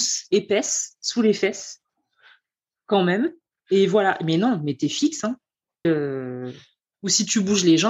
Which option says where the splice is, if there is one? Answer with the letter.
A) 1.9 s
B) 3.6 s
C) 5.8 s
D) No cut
C